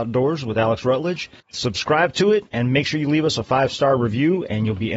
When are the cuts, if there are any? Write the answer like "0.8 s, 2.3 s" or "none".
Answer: 1.4 s